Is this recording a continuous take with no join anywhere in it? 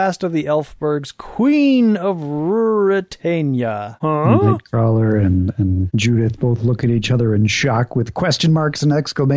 yes; 0 cuts

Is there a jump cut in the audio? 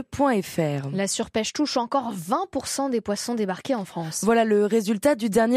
no; 0 cuts

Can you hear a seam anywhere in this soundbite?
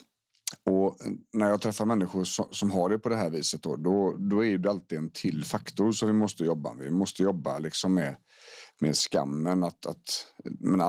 no; 0 cuts

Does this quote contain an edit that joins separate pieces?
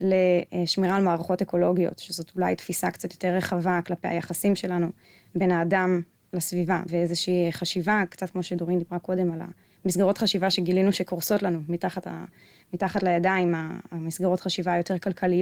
yes; 1 cut; at 6.9 s

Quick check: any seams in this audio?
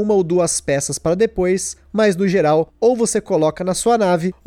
no; 0 cuts

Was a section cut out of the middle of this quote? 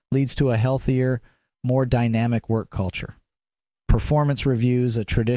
no; 0 cuts

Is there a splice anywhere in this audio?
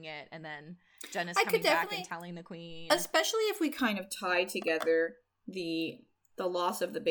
no; 0 cuts

